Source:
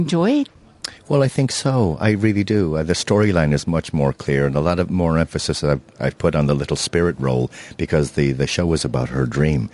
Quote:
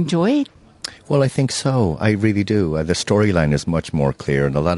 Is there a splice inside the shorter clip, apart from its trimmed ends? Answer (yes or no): no